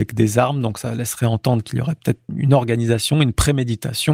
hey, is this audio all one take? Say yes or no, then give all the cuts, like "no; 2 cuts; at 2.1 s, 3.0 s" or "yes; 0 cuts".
no; 1 cut; at 2.3 s